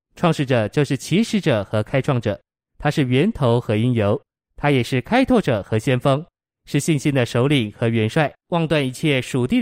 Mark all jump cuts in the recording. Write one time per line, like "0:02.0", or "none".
0:08.4